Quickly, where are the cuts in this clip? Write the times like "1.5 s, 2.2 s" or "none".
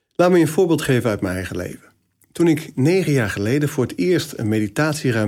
none